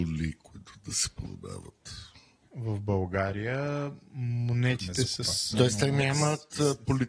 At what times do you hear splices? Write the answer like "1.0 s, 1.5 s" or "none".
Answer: 2.4 s, 5.5 s